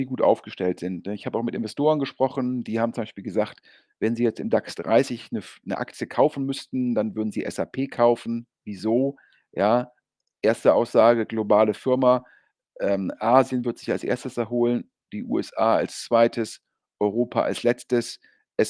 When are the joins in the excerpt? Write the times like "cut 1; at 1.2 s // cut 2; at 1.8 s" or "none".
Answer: none